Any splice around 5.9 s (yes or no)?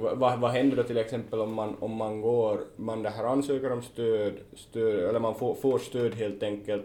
no